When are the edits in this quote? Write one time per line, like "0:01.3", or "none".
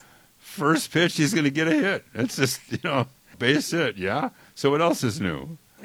0:03.3